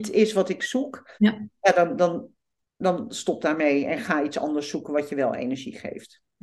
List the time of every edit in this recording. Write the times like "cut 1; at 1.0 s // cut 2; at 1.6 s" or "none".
cut 1; at 1.1 s